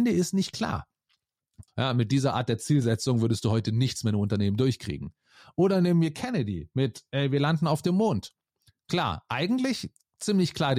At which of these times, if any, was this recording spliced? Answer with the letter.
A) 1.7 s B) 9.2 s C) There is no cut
A